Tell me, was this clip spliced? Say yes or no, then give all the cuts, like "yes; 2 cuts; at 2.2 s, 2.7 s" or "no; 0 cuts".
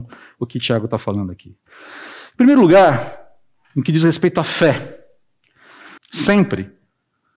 yes; 1 cut; at 6.0 s